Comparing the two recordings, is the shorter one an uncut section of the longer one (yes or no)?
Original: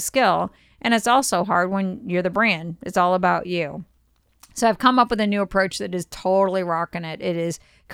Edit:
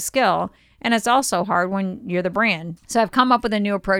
no